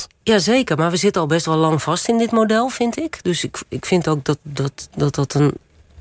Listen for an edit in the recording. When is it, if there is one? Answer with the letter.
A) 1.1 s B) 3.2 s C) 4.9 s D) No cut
D